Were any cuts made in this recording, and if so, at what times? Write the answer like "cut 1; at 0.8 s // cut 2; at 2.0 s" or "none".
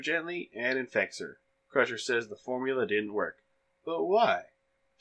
none